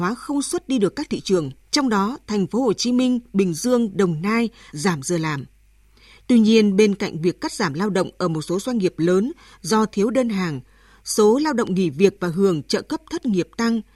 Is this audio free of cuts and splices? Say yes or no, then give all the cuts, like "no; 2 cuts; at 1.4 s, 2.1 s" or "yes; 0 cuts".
no; 2 cuts; at 1.6 s, 4.7 s